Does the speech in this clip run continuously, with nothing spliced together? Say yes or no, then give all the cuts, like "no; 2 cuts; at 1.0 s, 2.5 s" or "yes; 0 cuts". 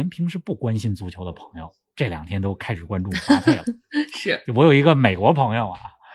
yes; 0 cuts